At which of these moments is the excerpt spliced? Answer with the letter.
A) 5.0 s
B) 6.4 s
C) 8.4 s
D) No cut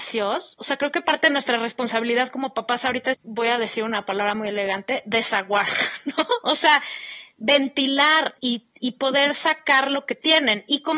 C